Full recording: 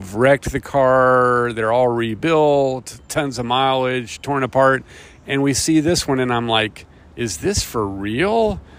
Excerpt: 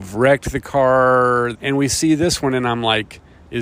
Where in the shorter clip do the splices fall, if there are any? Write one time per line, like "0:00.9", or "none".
0:01.5